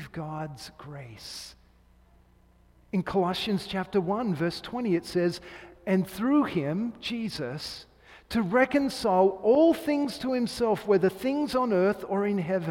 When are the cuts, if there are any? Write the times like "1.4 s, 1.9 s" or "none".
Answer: none

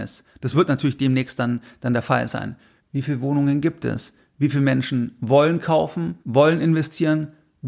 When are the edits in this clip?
2.8 s, 6.2 s

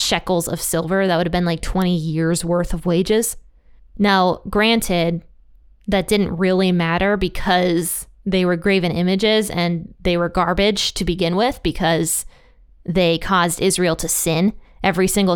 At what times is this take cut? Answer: 3.8 s

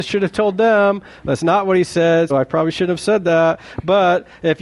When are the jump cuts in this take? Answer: 2.3 s

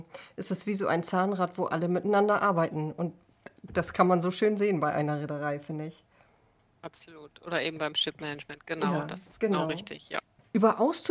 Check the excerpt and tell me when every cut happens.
none

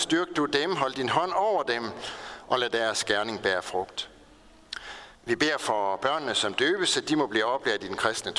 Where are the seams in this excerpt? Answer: 5.1 s

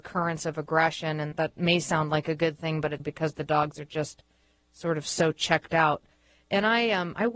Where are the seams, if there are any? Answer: 1.3 s, 3.0 s

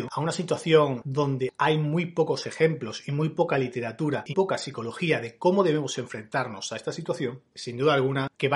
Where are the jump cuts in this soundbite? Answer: 4.3 s, 7.5 s

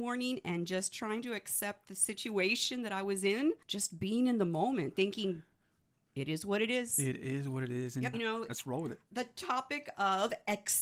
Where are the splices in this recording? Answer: 3.6 s, 8.1 s

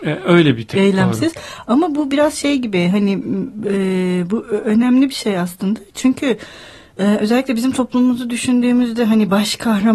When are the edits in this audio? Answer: none

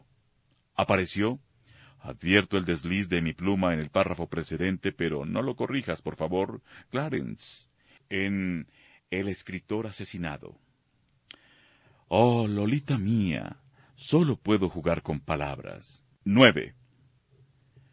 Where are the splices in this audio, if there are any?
16.1 s

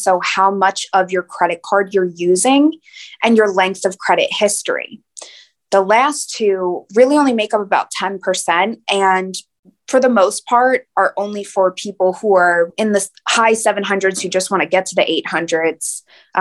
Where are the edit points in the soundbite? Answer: none

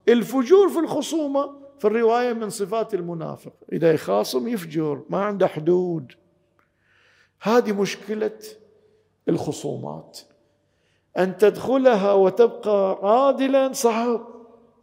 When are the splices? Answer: 3.6 s

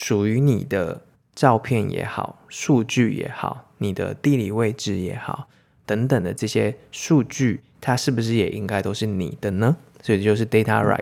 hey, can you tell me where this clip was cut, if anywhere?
none

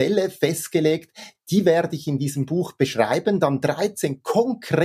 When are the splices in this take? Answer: none

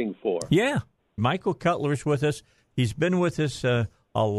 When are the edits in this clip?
1.2 s

